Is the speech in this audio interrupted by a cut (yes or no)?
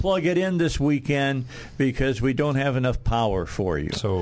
no